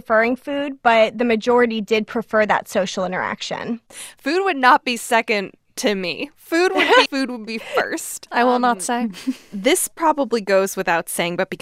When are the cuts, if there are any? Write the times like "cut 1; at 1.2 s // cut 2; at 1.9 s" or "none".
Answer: cut 1; at 7.1 s // cut 2; at 8.3 s